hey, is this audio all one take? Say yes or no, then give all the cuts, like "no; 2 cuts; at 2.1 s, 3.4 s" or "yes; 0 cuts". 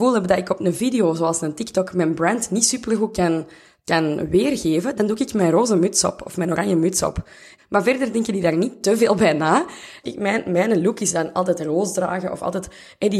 no; 2 cuts; at 7.6 s, 10.0 s